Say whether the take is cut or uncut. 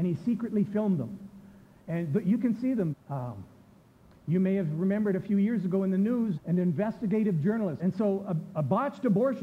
cut